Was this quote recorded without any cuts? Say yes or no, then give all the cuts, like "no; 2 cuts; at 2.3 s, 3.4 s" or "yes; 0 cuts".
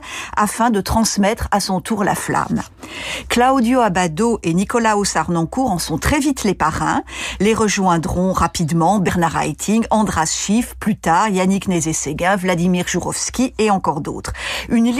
no; 1 cut; at 3.2 s